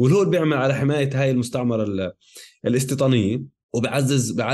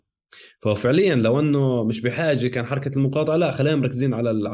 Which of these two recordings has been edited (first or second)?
first